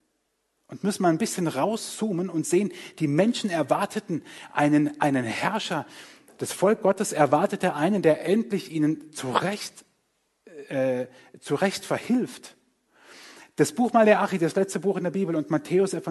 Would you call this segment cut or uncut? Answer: uncut